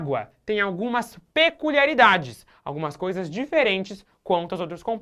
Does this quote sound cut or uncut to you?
uncut